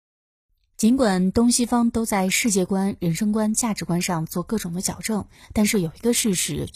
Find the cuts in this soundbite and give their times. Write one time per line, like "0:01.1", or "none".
none

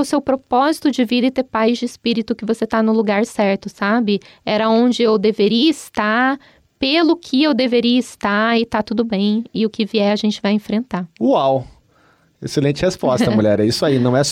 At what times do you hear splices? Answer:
none

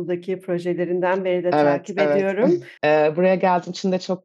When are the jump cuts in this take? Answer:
0:02.8

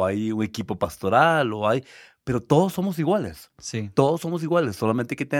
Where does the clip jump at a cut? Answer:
none

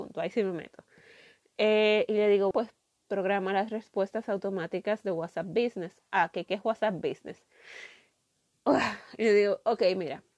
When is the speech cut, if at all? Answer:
0:02.5

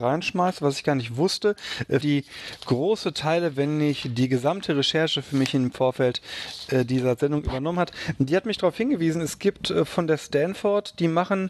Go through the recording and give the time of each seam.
0:02.0

